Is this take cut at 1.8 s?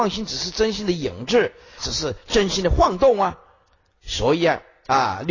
yes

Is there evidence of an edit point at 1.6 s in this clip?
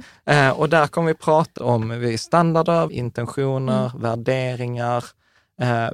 yes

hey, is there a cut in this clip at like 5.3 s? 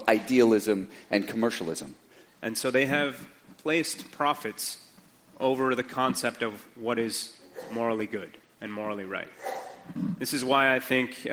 no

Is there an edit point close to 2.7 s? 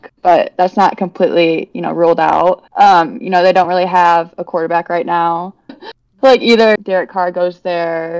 yes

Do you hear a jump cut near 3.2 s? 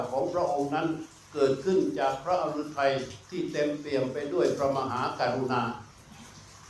yes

